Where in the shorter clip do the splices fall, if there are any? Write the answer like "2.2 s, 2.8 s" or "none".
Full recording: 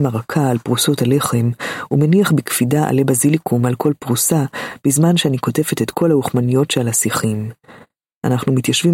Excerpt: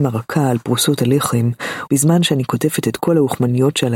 1.9 s

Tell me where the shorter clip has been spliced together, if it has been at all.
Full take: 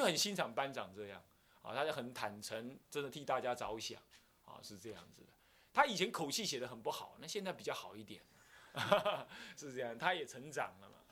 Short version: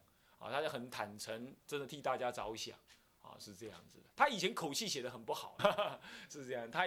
4.1 s, 5.6 s

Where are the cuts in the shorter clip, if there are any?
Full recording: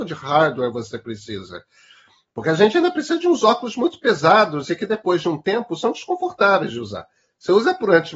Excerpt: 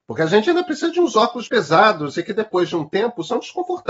1.5 s

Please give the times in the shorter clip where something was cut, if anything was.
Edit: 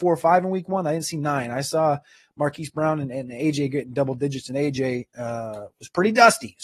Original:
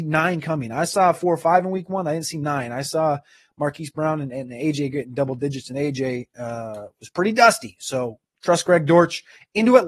none

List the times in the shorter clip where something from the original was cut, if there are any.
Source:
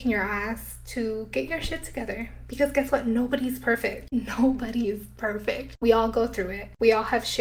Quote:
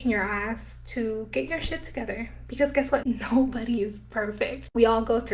3.0 s

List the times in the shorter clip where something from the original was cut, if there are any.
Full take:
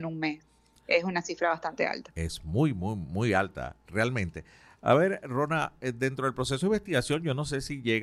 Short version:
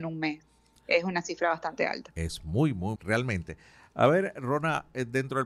3.0 s

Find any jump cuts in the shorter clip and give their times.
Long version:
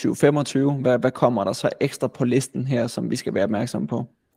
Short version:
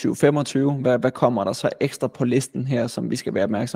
none

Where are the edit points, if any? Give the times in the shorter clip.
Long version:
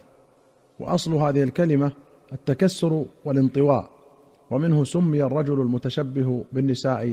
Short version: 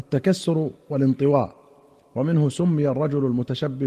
none

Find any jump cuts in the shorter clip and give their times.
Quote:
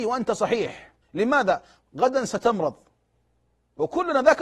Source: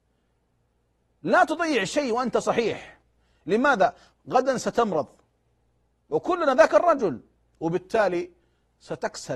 1.0 s

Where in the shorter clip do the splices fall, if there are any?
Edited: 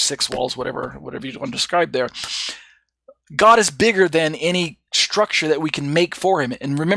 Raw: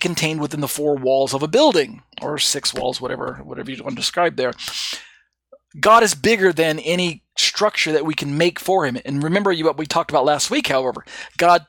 none

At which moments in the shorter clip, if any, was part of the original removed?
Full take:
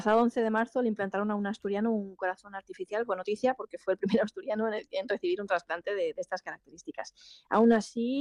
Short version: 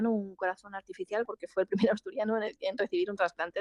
1.3 s

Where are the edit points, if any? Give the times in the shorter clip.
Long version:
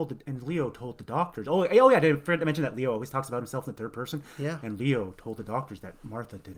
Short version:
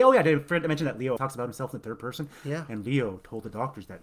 1.2 s

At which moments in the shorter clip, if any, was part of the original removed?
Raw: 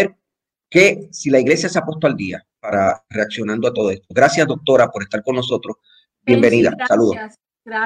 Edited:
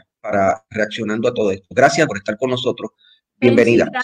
2.1 s

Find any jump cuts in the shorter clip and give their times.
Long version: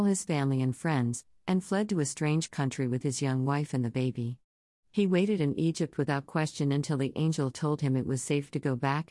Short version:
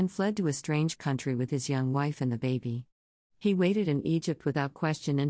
none

